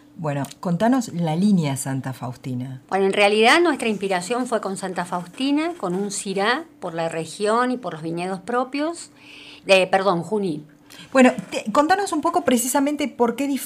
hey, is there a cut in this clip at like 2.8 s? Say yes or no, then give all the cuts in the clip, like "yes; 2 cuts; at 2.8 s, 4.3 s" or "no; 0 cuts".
yes; 2 cuts; at 2.8 s, 9.6 s